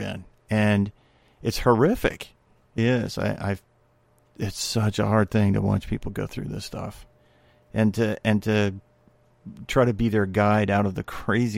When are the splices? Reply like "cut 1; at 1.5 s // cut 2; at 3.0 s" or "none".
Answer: cut 1; at 2.8 s